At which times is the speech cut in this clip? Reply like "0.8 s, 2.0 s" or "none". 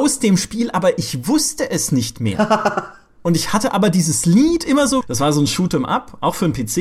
5.0 s